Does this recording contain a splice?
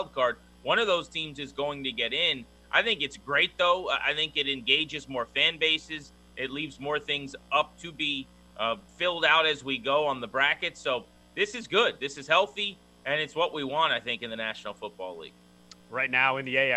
yes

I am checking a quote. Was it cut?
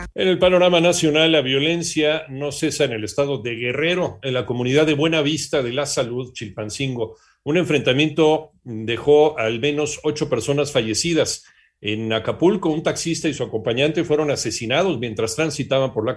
no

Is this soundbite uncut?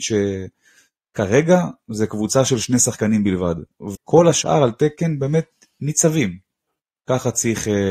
no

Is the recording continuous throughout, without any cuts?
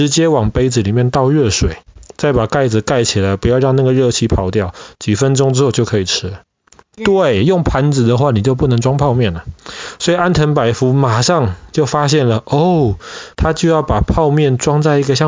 no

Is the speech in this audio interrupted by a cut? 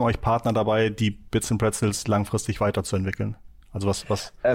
no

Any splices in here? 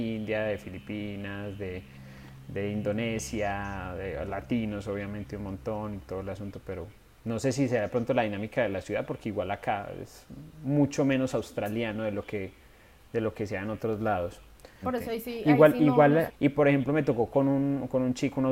yes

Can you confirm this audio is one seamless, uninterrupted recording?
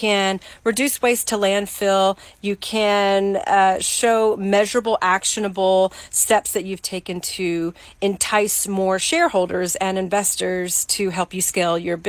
yes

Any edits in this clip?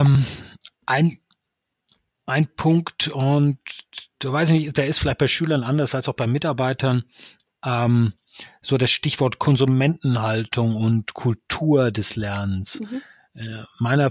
no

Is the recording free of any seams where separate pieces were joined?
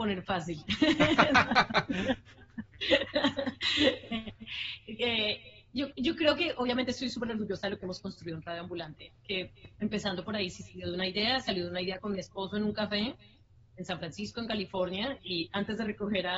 yes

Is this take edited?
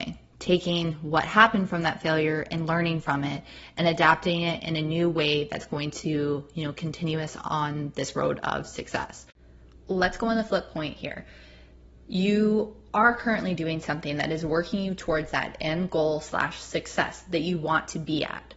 no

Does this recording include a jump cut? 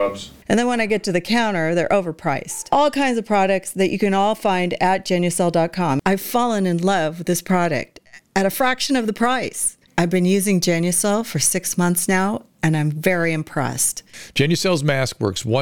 no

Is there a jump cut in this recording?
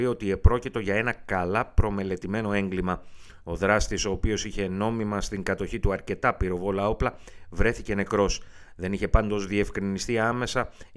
no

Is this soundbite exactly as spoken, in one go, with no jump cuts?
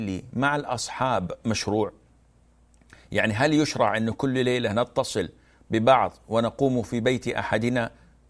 yes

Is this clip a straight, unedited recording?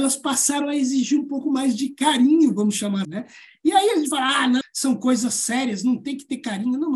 no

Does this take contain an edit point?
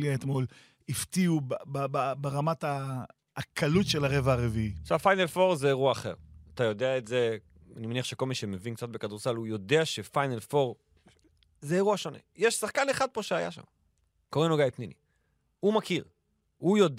no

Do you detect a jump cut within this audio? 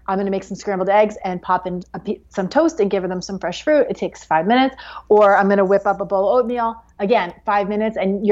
no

